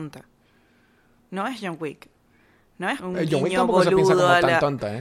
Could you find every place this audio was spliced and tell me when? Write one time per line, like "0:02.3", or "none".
0:03.0